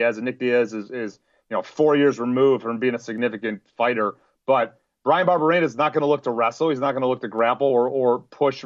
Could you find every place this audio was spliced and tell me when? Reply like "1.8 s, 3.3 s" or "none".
none